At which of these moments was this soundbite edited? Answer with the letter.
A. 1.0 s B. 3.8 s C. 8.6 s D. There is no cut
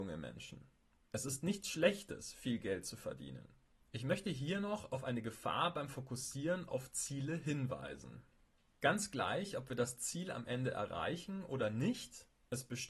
B